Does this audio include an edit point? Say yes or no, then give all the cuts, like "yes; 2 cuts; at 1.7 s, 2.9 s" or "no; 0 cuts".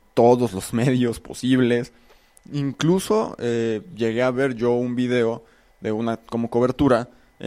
no; 0 cuts